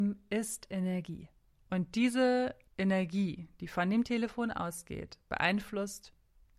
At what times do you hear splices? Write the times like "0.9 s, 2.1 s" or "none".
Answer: none